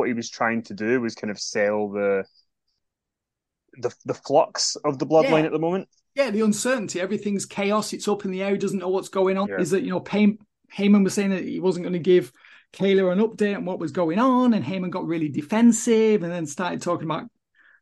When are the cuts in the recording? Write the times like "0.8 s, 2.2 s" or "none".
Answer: 9.4 s